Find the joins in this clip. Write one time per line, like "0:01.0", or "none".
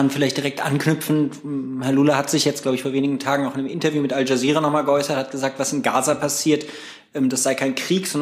none